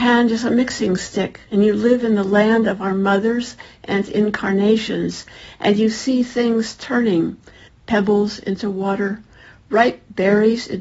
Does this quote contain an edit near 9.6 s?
no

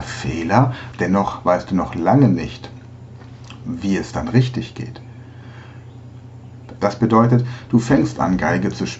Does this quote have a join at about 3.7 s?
no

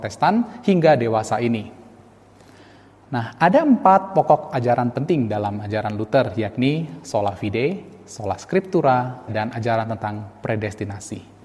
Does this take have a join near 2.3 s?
no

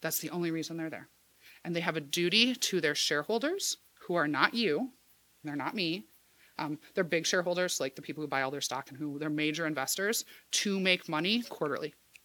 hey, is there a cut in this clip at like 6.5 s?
no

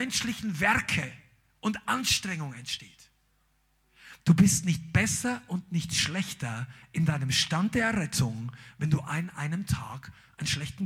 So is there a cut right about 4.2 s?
yes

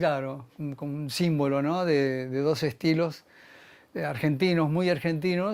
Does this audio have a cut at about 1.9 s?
no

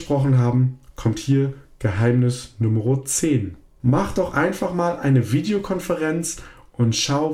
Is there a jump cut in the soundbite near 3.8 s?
yes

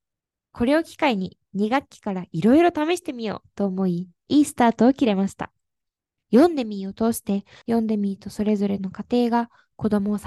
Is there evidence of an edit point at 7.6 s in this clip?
yes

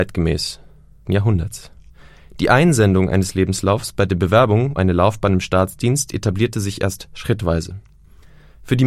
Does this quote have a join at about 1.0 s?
yes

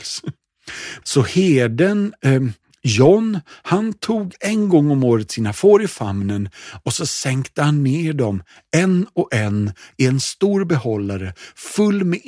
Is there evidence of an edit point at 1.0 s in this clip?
yes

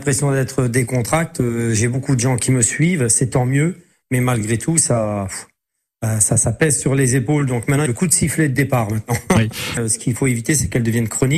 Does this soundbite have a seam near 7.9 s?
yes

